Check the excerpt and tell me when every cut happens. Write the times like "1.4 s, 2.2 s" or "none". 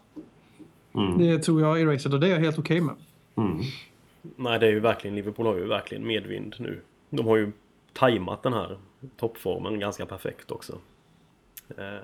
none